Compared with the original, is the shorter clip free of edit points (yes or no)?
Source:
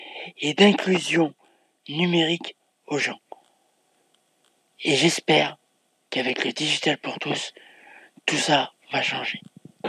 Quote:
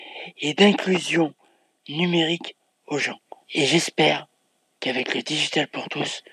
no